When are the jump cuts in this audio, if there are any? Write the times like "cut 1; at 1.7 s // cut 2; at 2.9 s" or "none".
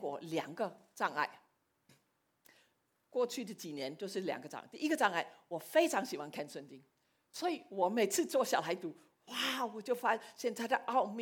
none